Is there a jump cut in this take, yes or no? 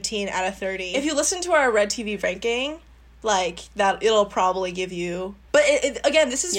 yes